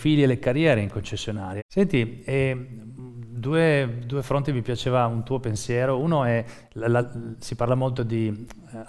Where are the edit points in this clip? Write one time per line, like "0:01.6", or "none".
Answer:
0:01.6